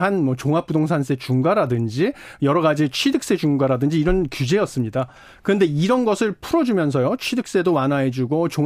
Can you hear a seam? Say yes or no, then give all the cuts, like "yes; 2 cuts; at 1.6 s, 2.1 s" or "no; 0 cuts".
no; 0 cuts